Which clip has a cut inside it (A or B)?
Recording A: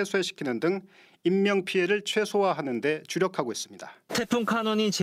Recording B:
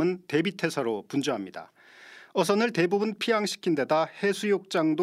A